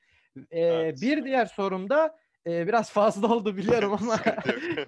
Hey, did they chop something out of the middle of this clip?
no; 0 cuts

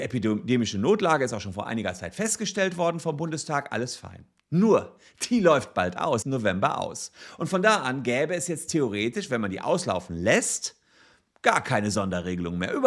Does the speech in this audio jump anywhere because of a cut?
yes; 1 cut; at 6.2 s

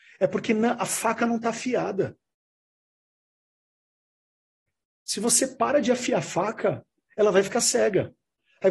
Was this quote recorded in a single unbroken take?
yes; 0 cuts

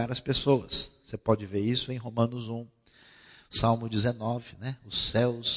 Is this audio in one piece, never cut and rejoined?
yes; 0 cuts

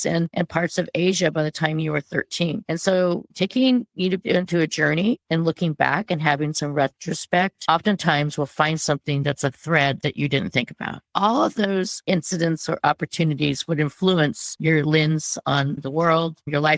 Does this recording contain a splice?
yes; 2 cuts; at 2.6 s, 11.1 s

